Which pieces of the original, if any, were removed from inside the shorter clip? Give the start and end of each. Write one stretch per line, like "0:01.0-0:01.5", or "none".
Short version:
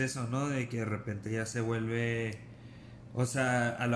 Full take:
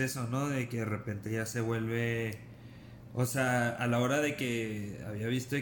none